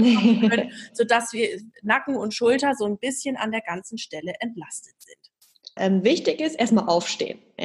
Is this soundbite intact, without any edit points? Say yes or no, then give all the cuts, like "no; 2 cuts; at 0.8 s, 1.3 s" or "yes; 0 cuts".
no; 1 cut; at 5.8 s